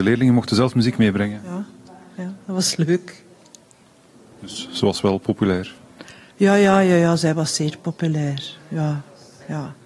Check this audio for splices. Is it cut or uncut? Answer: uncut